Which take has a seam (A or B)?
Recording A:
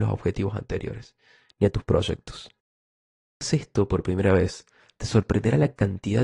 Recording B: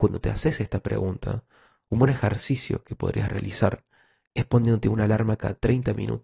A